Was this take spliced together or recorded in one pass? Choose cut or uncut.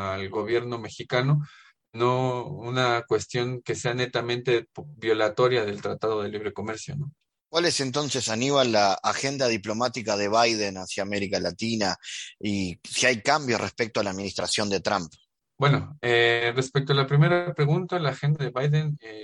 uncut